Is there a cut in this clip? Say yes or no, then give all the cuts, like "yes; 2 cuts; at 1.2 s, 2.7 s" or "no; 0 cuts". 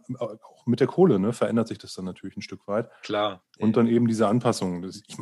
no; 0 cuts